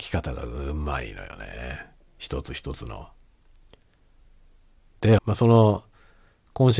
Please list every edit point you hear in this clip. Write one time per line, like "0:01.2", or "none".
0:05.2